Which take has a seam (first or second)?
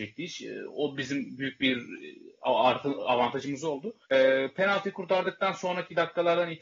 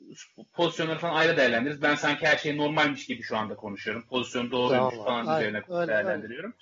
first